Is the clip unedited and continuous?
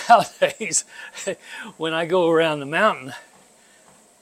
yes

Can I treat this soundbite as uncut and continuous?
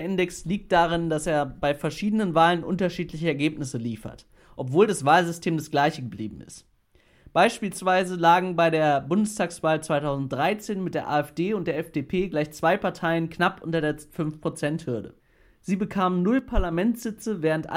yes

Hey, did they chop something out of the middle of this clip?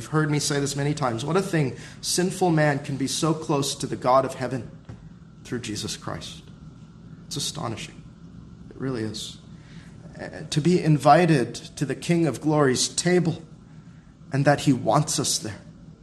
no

